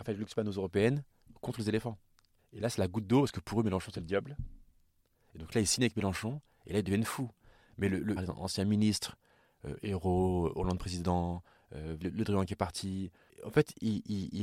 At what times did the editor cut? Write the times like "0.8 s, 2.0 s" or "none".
2.4 s, 8.2 s, 12.0 s